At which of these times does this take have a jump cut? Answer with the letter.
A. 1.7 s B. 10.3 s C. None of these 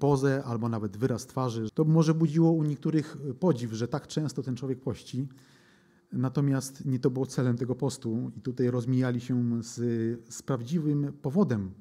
A